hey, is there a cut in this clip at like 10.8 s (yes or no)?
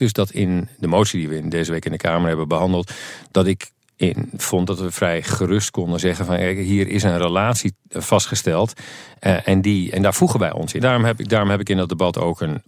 yes